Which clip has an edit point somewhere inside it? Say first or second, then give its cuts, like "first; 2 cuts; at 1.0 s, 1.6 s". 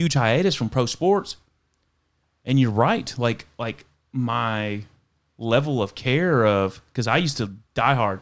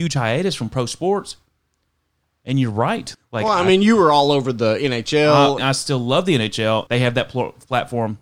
second; 3 cuts; at 3.1 s, 5.6 s, 6.9 s